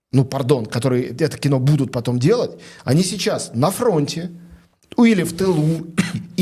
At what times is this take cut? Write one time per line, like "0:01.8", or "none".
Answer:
none